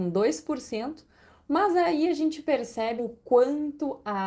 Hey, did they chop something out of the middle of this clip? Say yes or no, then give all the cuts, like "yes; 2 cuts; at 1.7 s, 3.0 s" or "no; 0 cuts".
yes; 1 cut; at 3.0 s